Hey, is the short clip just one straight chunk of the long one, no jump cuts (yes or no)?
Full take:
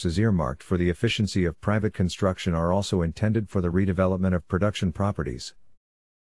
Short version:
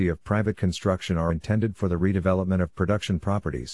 no